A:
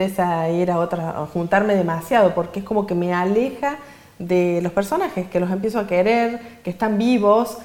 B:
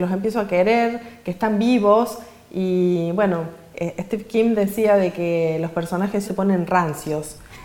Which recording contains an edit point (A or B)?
B